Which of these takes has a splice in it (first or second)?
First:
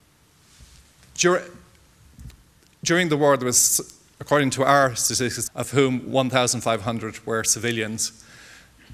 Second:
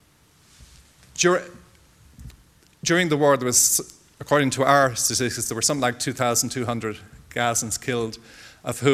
first